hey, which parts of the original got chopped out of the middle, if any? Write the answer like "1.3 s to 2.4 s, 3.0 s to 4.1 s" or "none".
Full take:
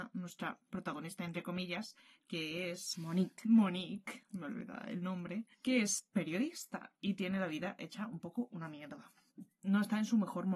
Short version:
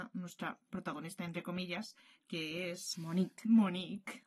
none